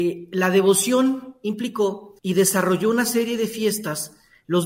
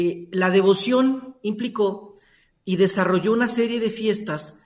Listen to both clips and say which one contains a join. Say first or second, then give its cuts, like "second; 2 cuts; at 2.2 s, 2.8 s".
first; 1 cut; at 2.2 s